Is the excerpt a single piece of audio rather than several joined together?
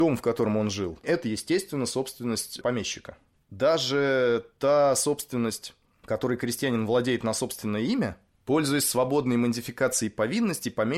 no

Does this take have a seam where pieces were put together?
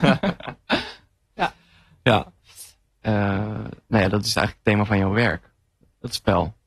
yes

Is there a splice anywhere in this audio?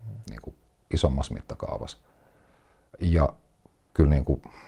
no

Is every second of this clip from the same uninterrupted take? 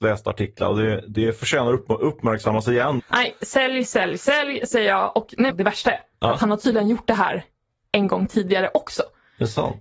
no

